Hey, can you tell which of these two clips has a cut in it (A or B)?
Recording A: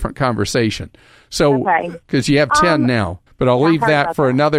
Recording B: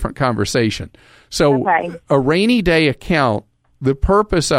A